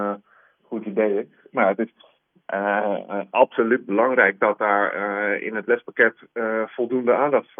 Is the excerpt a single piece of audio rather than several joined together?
no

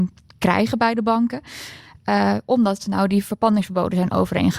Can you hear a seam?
no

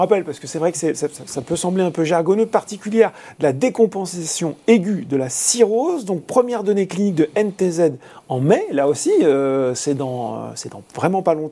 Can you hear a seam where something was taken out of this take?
no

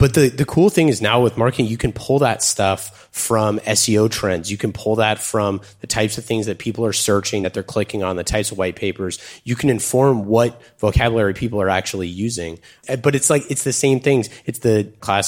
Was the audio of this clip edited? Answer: no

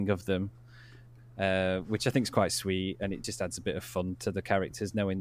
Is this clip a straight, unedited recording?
yes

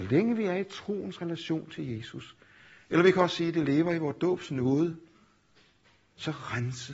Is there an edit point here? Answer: no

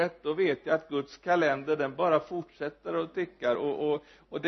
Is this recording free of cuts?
yes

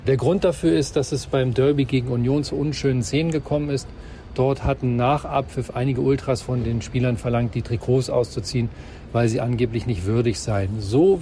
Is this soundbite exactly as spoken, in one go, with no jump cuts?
yes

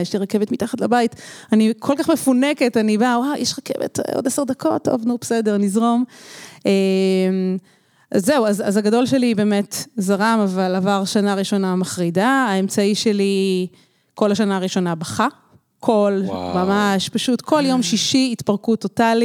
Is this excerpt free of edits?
yes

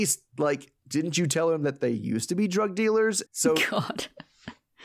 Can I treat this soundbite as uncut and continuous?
no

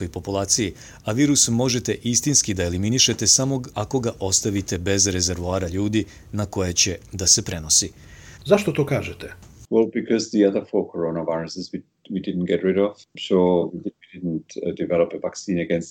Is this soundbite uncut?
no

